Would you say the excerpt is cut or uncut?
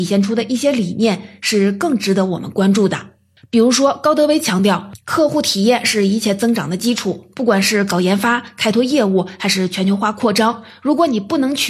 uncut